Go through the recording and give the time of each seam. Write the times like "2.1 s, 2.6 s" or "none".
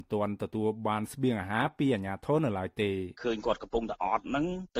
3.2 s